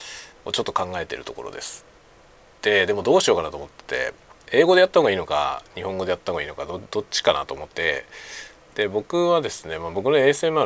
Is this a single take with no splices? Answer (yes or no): no